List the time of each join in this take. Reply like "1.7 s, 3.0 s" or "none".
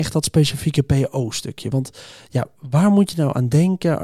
none